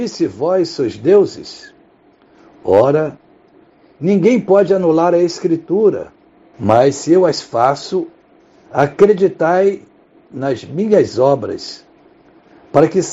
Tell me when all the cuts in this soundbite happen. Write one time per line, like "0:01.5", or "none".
0:06.5
0:08.7